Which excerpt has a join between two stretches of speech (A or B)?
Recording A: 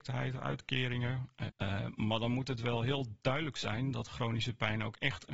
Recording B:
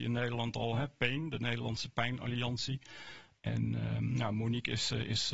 A